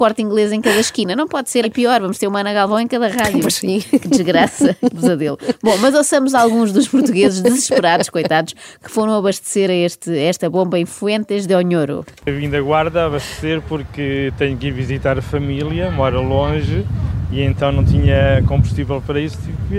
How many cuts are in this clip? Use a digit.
1